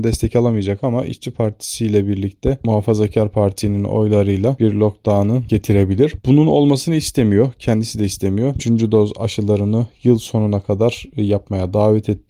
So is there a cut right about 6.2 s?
no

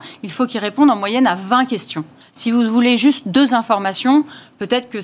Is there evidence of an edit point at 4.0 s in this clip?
no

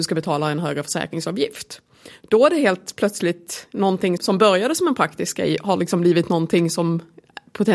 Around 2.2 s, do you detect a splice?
no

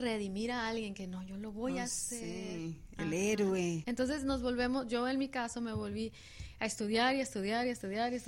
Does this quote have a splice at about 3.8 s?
yes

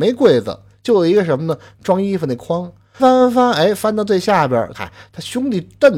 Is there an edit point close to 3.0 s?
yes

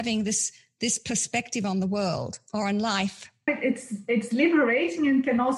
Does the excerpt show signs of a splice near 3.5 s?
yes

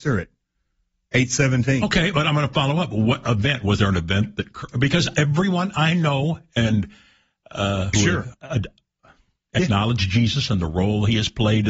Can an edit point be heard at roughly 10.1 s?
no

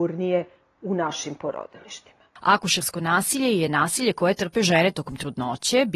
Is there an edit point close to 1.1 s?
no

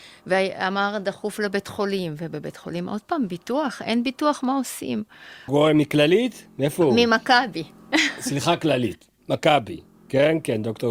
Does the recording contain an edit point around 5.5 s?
yes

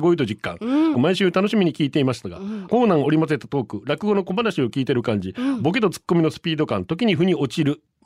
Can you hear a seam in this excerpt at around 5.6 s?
no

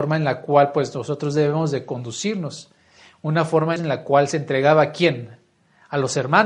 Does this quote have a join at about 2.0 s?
no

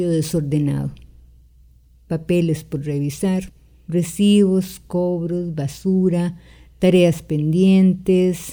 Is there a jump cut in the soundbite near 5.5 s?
no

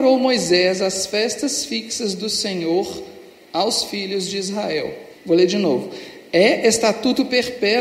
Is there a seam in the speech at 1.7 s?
no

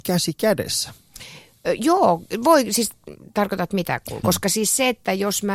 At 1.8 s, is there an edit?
no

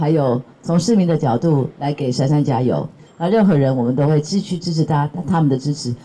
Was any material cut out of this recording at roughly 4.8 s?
no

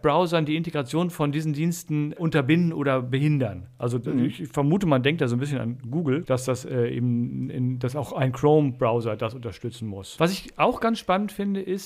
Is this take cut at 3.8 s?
no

